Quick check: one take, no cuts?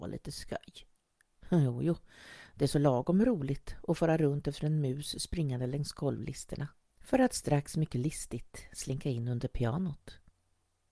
yes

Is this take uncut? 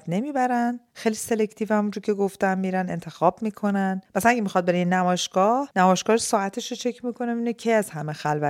yes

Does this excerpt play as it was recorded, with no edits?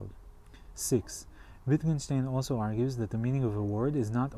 yes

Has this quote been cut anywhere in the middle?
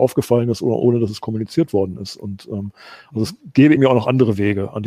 yes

